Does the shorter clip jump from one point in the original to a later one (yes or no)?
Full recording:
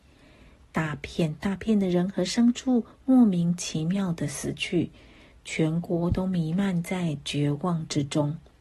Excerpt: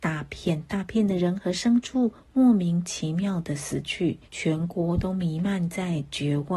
yes